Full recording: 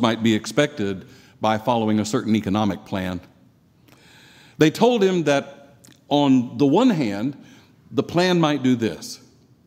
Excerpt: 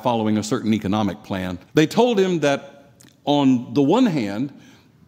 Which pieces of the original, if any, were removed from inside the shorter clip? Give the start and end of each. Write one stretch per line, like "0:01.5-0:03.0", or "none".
0:03.3-0:04.5